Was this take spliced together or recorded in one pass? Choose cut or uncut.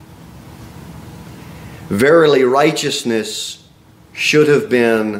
uncut